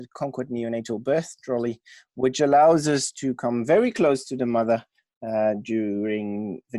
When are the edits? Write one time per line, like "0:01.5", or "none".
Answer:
none